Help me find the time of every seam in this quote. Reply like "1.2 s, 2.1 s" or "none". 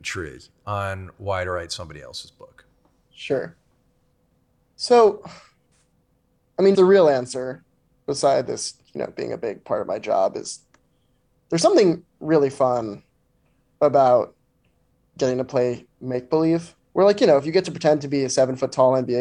6.7 s, 16.8 s